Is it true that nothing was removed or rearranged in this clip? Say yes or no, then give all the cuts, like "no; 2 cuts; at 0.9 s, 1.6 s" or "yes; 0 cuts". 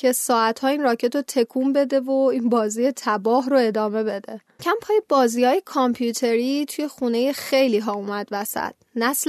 no; 1 cut; at 4.6 s